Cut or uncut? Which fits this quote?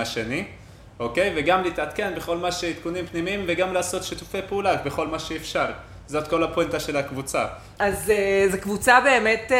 cut